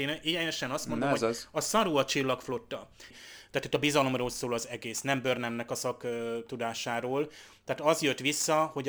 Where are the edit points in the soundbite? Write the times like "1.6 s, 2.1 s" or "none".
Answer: 3.1 s